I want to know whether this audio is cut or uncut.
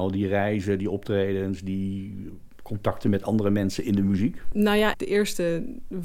cut